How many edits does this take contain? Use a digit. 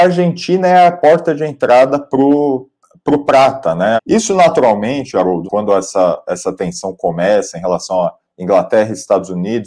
2